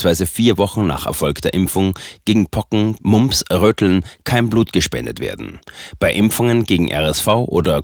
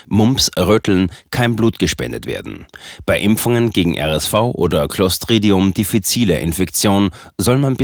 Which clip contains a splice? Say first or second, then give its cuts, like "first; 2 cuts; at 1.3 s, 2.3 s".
first; 1 cut; at 3.0 s